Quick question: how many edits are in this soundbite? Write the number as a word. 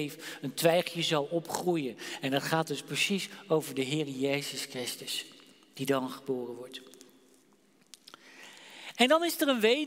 zero